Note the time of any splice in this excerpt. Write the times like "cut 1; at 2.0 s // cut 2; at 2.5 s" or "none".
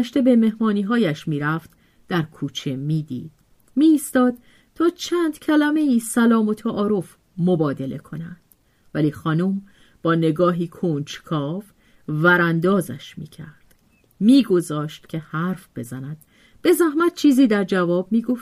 none